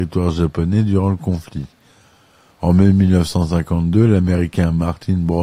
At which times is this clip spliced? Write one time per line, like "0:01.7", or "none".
none